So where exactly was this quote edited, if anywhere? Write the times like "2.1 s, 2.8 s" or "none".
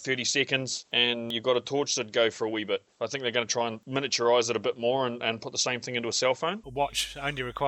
6.6 s